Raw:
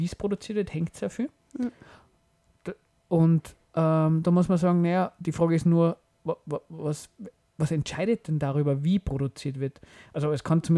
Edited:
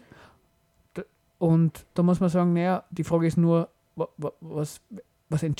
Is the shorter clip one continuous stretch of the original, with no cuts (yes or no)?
no